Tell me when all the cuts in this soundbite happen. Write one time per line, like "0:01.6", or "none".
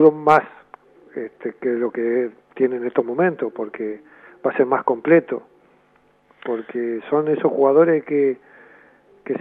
none